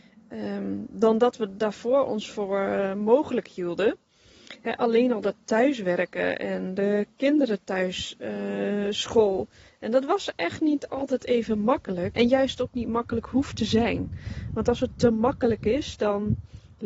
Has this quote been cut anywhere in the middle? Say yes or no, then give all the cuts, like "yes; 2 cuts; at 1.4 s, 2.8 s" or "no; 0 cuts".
yes; 1 cut; at 12.1 s